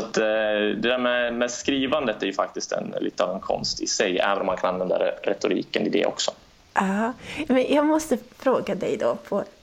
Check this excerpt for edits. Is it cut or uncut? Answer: uncut